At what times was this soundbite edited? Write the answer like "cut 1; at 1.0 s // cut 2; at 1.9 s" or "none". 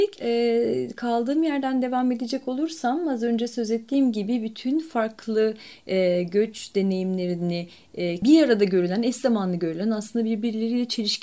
cut 1; at 8.2 s

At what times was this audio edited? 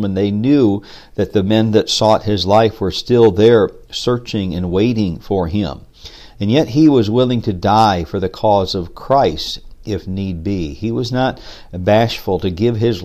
none

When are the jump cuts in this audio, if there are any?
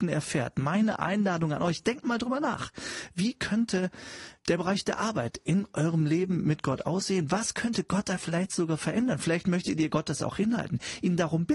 cut 1; at 4.4 s

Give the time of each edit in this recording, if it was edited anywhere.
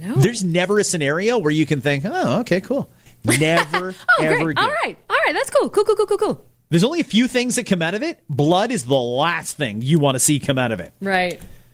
none

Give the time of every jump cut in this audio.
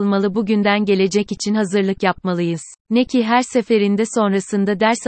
cut 1; at 2.8 s

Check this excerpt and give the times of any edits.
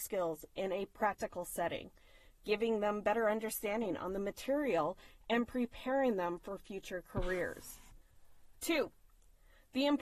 none

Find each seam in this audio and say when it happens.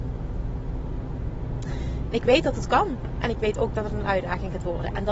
cut 1; at 2.1 s // cut 2; at 3.2 s

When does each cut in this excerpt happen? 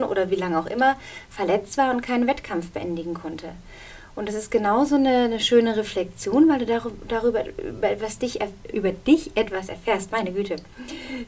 cut 1; at 8.7 s

